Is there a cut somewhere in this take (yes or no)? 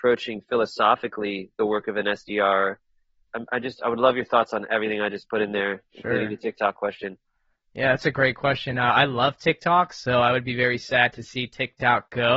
no